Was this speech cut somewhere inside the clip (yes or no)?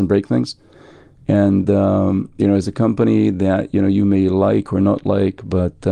no